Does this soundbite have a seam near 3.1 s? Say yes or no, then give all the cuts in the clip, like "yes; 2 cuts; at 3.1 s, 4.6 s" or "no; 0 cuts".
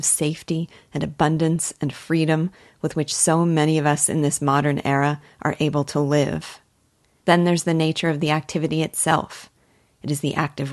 no; 1 cut; at 7.2 s